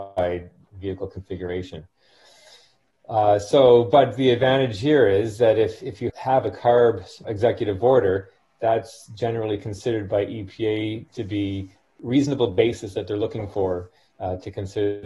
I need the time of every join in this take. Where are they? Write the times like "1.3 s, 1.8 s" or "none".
6.1 s, 7.2 s